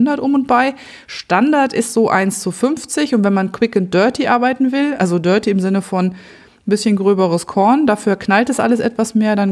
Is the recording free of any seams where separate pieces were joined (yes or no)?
yes